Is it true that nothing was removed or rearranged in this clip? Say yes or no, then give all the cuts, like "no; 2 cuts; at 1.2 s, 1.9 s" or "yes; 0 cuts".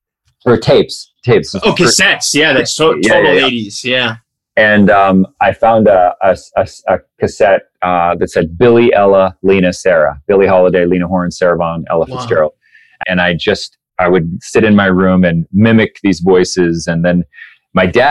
no; 1 cut; at 13.0 s